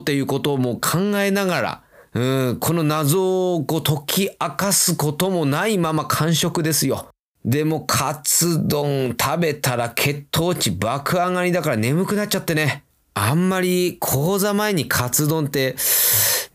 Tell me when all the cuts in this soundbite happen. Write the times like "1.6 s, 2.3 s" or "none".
none